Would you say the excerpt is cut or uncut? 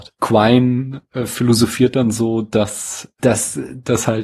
cut